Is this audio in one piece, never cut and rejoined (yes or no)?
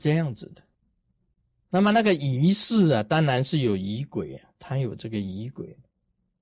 yes